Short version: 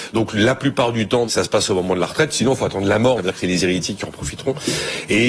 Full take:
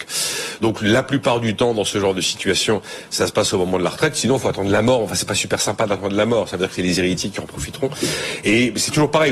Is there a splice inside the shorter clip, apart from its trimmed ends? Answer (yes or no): yes